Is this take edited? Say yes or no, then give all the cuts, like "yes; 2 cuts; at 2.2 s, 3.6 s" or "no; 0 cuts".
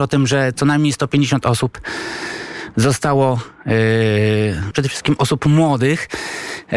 yes; 1 cut; at 4.7 s